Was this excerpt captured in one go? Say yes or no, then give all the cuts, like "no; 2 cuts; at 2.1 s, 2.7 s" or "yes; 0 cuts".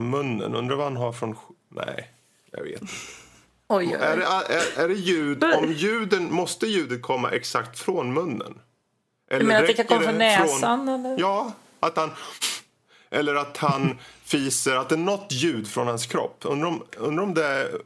no; 1 cut; at 16.9 s